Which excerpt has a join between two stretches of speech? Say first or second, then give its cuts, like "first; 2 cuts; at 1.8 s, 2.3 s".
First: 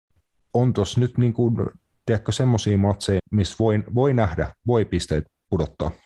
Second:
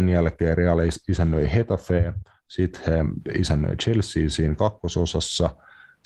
first; 2 cuts; at 3.2 s, 4.6 s